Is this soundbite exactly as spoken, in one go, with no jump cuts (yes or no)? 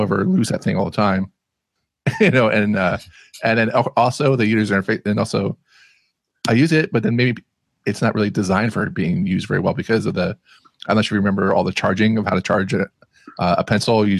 yes